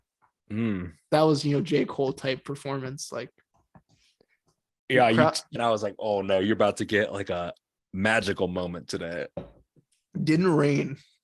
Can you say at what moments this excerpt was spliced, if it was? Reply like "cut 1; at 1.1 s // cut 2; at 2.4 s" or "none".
cut 1; at 5.6 s

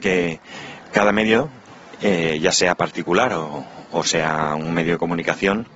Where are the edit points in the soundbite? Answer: none

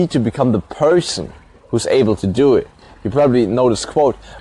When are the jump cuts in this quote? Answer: none

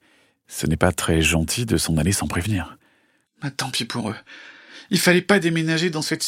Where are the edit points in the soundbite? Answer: cut 1; at 3.2 s

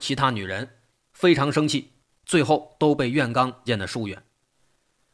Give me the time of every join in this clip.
cut 1; at 3.7 s

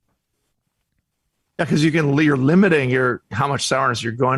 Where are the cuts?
none

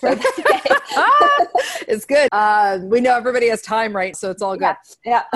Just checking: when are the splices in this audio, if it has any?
cut 1; at 2.3 s // cut 2; at 4.1 s

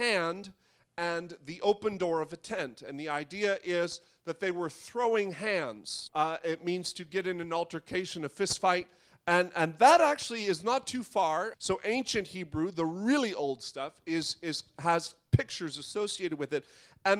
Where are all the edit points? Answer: cut 1; at 6.1 s // cut 2; at 11.5 s

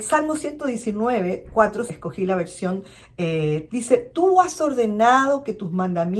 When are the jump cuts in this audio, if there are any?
cut 1; at 1.9 s // cut 2; at 3.7 s

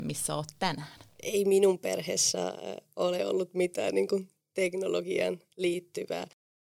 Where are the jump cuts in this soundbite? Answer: cut 1; at 1.2 s

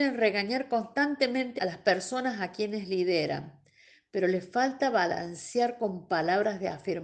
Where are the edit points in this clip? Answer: cut 1; at 1.6 s

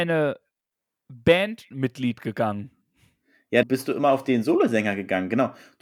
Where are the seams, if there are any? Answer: cut 1; at 3.6 s

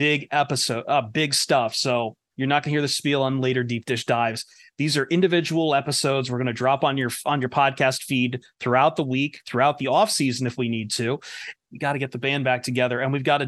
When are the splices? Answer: cut 1; at 2.3 s // cut 2; at 11.5 s

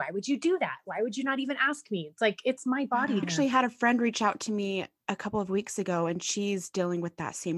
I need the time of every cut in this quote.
cut 1; at 3.2 s

